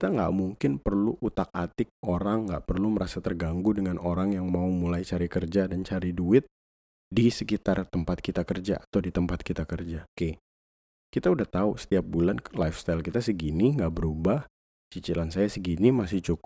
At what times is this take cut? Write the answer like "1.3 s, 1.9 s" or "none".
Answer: 10.1 s